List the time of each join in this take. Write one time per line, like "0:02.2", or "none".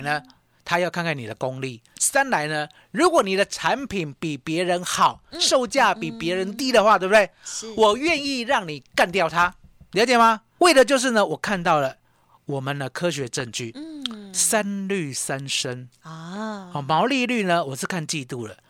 0:10.6